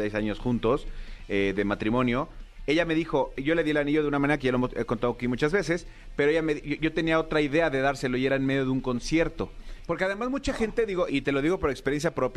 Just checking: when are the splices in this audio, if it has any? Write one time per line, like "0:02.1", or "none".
0:09.9
0:11.1

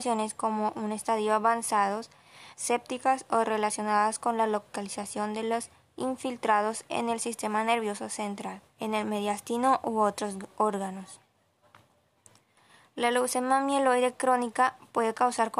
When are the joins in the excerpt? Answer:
0:02.5
0:08.7

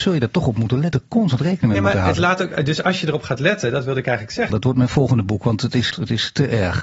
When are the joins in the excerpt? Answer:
0:04.5
0:05.9

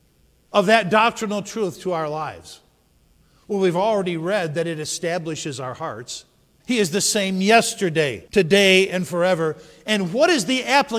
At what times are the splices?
0:06.6
0:08.3

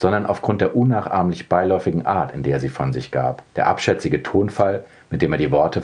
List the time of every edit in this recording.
0:03.5

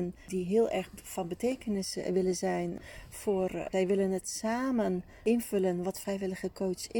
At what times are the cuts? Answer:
0:03.7

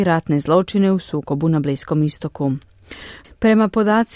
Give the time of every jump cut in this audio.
0:03.2

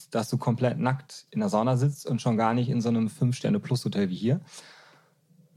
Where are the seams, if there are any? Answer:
none

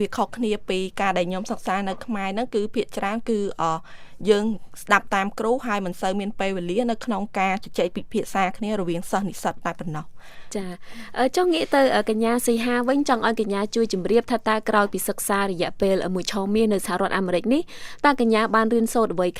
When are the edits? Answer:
none

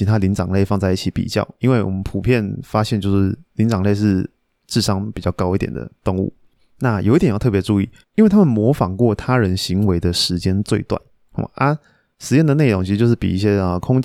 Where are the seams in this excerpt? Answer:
0:08.0
0:11.3

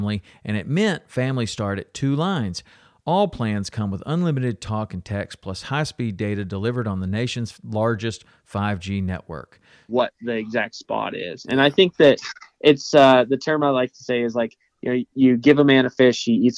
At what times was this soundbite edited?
0:09.9
0:15.1

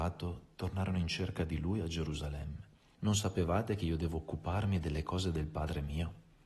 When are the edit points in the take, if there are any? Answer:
0:02.9

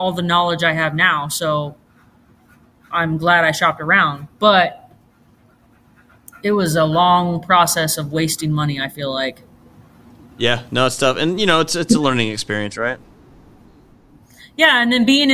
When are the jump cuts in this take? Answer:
none

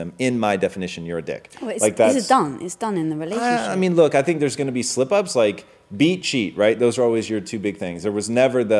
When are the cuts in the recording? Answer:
none

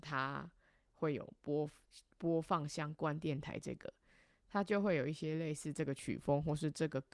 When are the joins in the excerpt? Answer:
none

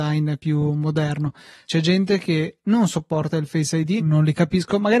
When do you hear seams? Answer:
0:01.7
0:04.0

